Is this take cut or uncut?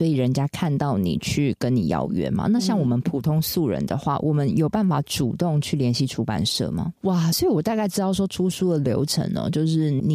cut